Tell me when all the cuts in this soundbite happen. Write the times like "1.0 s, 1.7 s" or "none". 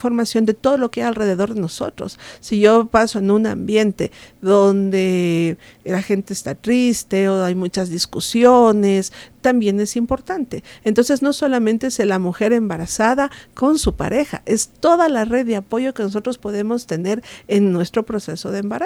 none